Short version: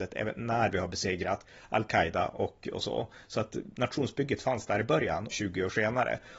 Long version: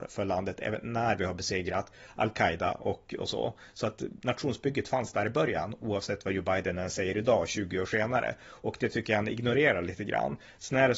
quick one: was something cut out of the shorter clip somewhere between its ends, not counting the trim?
yes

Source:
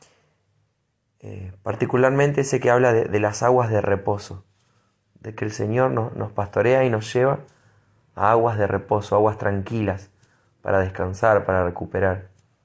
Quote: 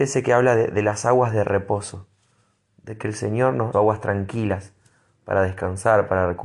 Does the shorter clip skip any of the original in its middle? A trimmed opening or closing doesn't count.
yes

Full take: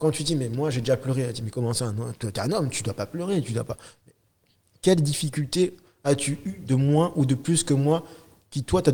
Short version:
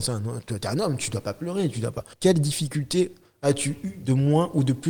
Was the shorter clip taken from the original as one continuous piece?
no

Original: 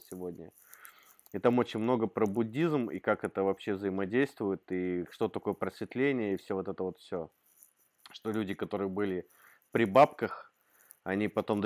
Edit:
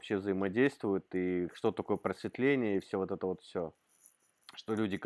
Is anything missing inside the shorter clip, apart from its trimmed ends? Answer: no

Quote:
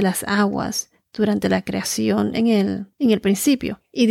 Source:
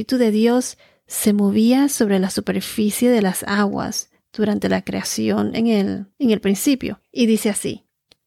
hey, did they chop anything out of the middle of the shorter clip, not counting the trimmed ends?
no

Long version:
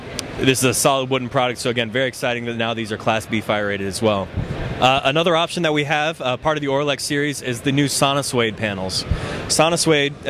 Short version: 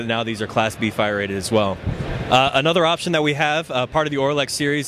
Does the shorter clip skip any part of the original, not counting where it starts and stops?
no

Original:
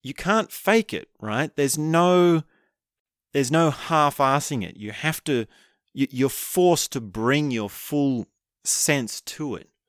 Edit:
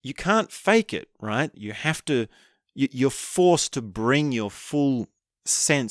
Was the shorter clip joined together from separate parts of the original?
yes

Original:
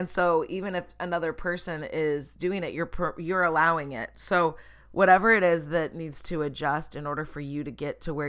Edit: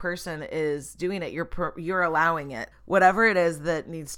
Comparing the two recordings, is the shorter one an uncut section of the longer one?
no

